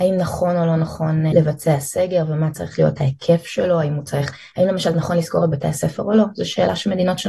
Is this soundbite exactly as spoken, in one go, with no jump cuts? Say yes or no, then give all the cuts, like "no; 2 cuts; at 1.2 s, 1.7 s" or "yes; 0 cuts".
no; 1 cut; at 1.3 s